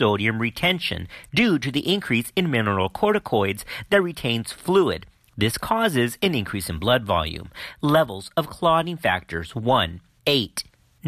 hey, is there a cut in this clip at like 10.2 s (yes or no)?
yes